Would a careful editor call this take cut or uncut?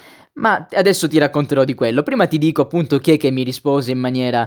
uncut